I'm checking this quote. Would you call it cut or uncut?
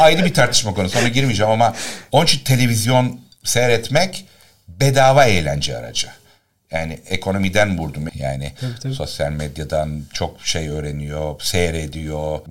cut